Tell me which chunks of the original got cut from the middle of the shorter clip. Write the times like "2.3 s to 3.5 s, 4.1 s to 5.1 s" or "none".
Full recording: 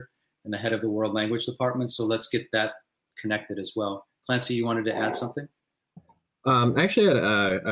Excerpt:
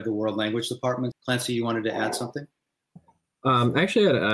1.9 s to 4.1 s